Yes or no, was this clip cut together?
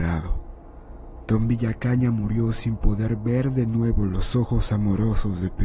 no